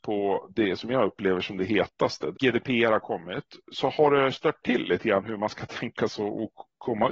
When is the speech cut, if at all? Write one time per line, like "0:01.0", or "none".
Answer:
0:02.3